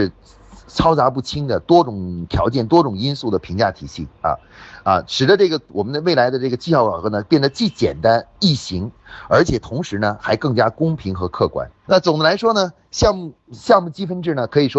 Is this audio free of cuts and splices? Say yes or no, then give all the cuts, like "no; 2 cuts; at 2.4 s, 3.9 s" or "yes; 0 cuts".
no; 1 cut; at 11.8 s